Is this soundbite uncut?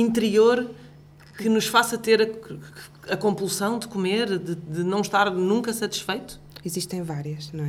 yes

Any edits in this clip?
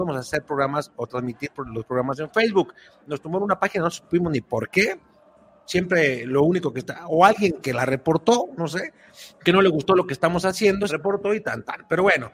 yes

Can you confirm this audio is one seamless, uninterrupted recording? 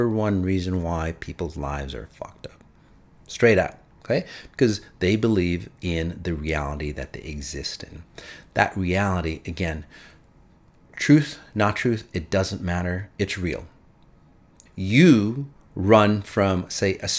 no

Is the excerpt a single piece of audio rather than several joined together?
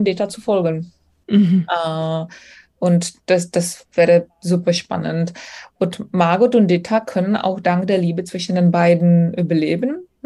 no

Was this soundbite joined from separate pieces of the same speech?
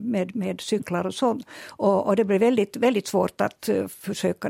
no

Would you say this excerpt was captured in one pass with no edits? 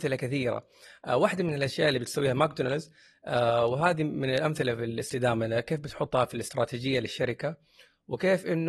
yes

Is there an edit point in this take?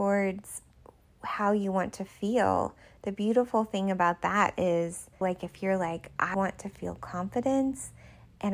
yes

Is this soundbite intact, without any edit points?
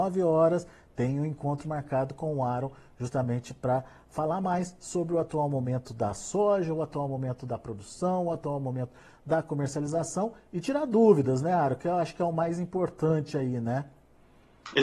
yes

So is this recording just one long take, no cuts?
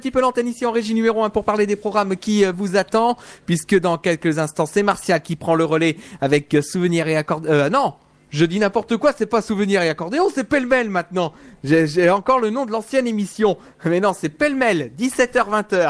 yes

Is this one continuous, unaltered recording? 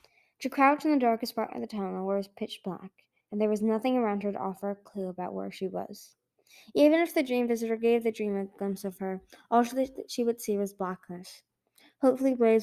yes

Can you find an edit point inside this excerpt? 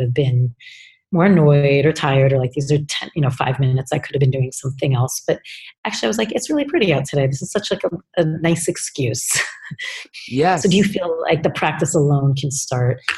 no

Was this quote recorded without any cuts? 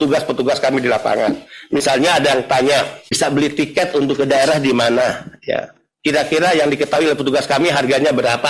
yes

